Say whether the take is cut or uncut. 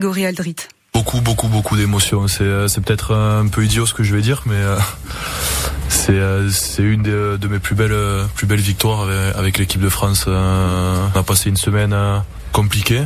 uncut